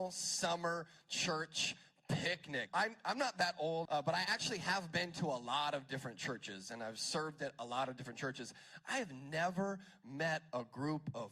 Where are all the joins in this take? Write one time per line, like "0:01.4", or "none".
0:02.7
0:03.9